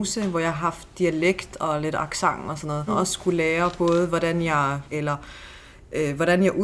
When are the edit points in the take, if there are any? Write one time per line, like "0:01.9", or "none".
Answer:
0:02.9
0:04.9